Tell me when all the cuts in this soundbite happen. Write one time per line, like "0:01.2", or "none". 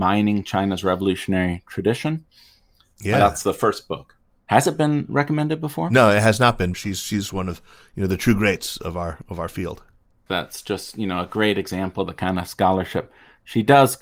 0:06.7
0:10.3

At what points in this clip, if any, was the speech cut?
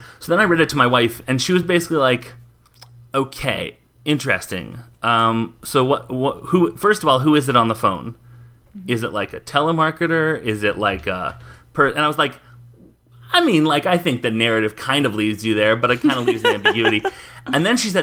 none

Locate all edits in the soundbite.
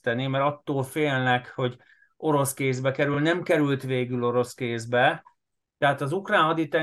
none

